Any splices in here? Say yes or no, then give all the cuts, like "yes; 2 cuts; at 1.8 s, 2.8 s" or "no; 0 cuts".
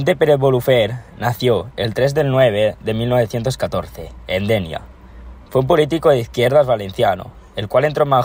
no; 0 cuts